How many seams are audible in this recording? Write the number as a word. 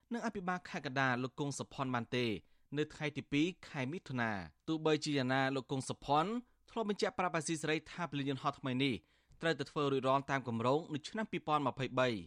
one